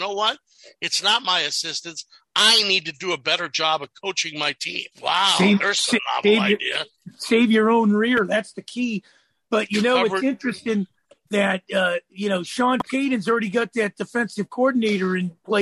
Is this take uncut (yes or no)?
no